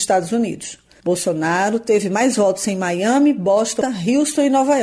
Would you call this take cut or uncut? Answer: cut